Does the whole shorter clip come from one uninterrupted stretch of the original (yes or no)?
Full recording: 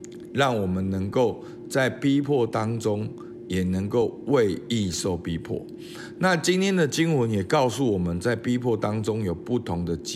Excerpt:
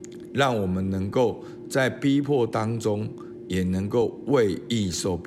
yes